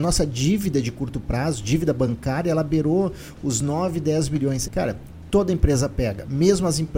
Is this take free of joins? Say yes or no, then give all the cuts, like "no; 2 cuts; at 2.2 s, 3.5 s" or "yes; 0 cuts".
no; 1 cut; at 4.7 s